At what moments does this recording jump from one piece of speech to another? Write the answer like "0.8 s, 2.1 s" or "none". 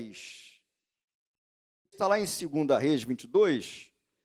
1.9 s